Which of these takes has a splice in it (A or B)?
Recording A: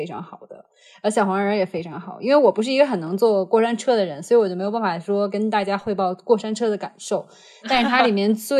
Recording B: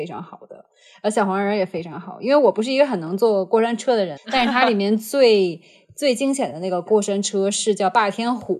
B